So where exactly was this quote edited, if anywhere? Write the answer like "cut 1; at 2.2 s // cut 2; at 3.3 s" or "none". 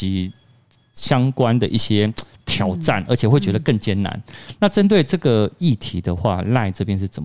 none